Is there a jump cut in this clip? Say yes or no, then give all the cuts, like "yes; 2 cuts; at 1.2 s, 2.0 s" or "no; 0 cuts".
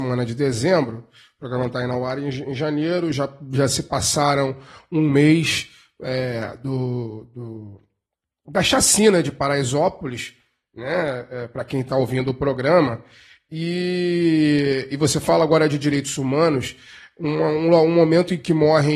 no; 0 cuts